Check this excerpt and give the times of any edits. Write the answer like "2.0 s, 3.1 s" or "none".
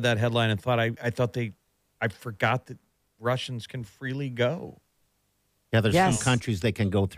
1.0 s